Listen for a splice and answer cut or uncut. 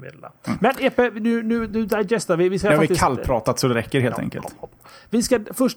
uncut